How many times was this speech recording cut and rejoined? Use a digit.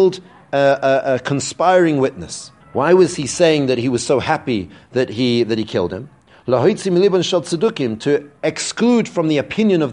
1